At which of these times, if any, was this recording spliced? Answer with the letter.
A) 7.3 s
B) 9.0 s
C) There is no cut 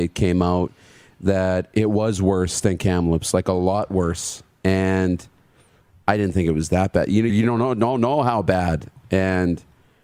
A